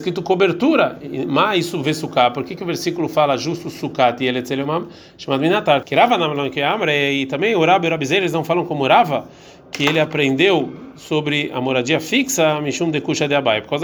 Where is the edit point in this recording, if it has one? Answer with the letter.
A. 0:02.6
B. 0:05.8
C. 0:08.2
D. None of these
B